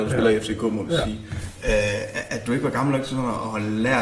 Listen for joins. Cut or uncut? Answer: uncut